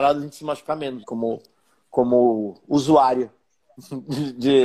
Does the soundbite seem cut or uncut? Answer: cut